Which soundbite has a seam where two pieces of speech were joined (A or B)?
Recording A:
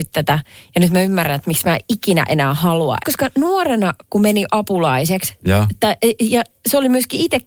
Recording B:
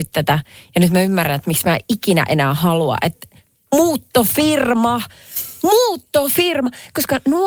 A